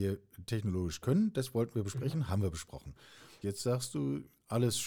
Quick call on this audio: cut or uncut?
cut